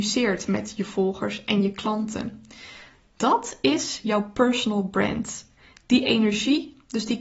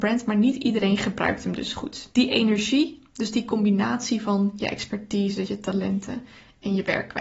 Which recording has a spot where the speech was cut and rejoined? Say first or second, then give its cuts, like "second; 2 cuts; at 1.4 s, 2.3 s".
second; 2 cuts; at 2.1 s, 5.4 s